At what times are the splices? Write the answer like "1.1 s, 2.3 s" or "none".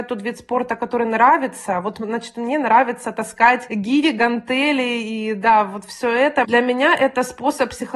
6.4 s